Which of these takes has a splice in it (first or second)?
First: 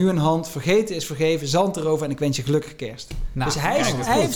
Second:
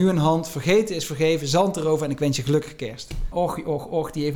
second